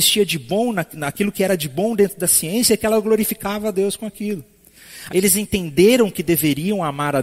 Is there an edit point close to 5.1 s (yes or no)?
yes